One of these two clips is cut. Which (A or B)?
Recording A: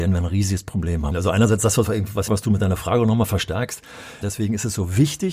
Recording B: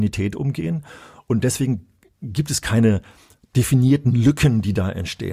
A